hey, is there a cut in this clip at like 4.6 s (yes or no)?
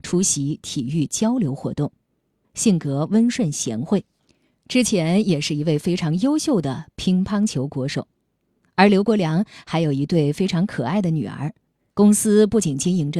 no